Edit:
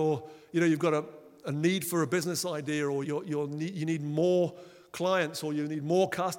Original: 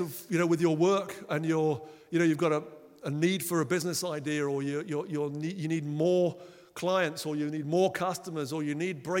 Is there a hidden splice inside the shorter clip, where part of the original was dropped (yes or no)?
yes